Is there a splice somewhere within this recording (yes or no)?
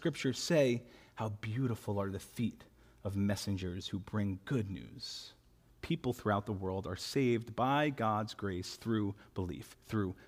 yes